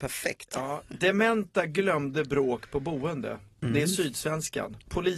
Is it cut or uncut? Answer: uncut